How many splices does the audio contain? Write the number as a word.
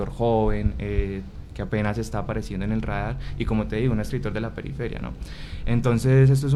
zero